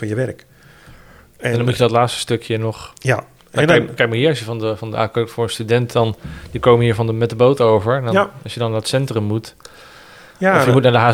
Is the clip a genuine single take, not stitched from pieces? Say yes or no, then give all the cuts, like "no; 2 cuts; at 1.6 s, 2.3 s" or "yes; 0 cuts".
yes; 0 cuts